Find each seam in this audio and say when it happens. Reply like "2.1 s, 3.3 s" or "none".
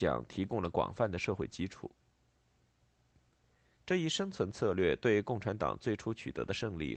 3.8 s